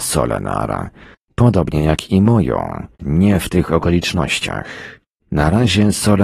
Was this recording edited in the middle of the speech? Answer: yes; 2 cuts; at 1.2 s, 3.0 s

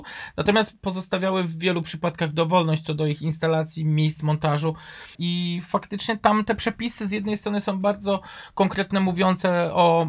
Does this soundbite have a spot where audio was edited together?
yes; 1 cut; at 5.2 s

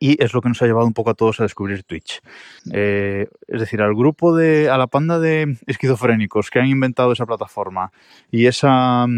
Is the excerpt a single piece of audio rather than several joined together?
no; 1 cut; at 2.6 s

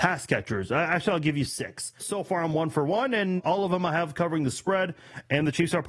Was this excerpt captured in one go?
no; 2 cuts; at 2.0 s, 3.4 s

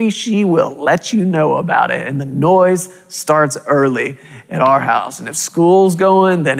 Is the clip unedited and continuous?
yes; 0 cuts

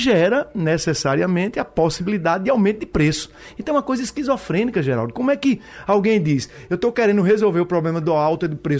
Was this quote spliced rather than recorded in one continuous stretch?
no; 0 cuts

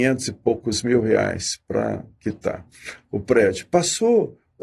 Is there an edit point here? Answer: no; 0 cuts

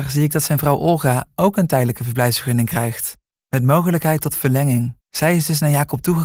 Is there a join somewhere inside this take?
yes; 1 cut; at 5.0 s

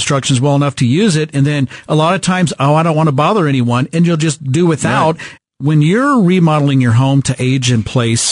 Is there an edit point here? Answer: yes; 1 cut; at 5.4 s

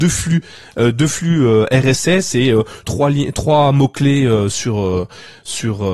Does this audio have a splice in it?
yes; 1 cut; at 2.8 s

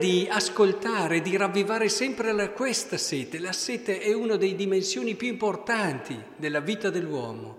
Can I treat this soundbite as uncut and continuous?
yes; 0 cuts

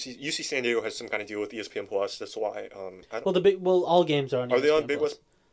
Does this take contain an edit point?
no; 0 cuts

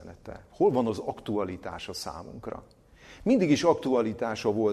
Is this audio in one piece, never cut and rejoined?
yes; 0 cuts

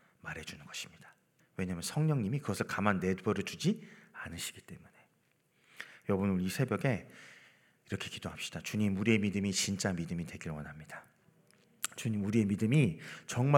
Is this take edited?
yes; 1 cut; at 1.4 s

